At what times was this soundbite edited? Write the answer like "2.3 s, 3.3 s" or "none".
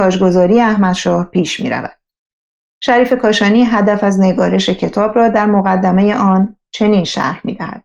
none